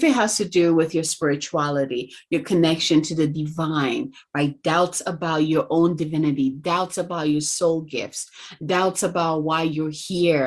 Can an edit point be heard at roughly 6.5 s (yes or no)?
no